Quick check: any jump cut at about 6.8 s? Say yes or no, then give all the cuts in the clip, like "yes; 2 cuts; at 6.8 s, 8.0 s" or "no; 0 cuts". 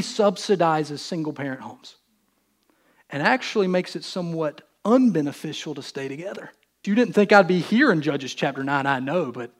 yes; 1 cut; at 6.8 s